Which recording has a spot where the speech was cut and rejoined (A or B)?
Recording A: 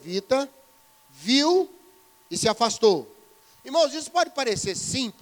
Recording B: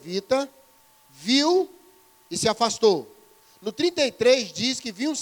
A